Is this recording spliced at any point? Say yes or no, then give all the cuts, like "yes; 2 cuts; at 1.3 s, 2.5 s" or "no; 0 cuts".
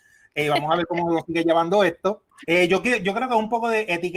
yes; 1 cut; at 2.4 s